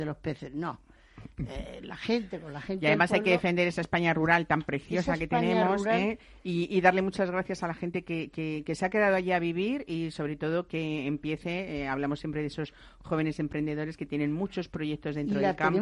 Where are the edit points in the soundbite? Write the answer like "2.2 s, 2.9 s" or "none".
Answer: none